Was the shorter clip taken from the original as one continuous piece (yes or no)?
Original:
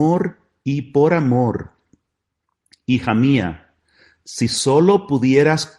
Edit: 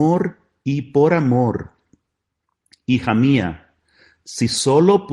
yes